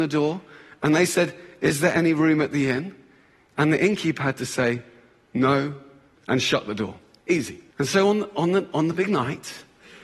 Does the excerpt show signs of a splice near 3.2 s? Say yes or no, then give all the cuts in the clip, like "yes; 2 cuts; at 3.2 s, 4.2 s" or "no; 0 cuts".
no; 2 cuts; at 6.1 s, 7.7 s